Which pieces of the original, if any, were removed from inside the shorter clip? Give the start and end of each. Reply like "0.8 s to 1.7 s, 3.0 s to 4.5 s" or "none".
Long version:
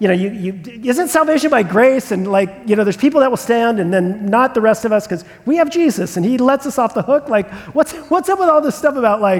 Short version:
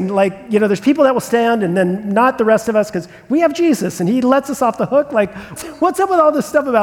7.7 s to 7.9 s